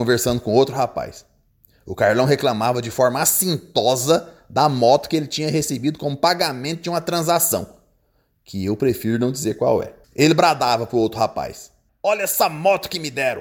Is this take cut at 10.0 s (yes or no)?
yes